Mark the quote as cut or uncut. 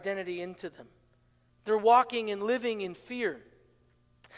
cut